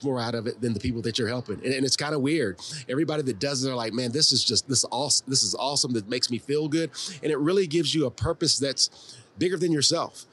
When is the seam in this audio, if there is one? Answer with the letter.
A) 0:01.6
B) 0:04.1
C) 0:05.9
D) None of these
D